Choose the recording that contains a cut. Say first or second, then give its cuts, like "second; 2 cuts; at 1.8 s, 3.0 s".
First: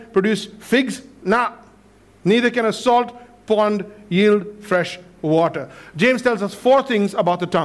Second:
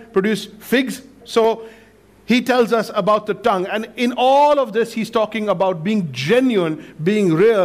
second; 1 cut; at 1.2 s